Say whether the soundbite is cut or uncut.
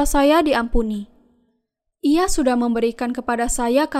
uncut